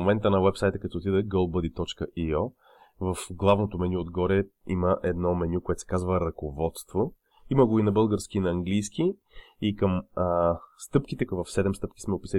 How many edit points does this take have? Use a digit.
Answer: 1